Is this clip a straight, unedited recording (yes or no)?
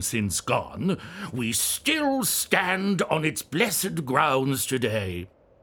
yes